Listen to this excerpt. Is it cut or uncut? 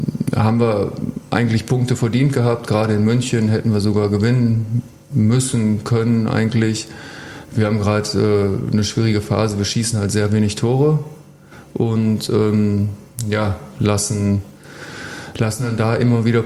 uncut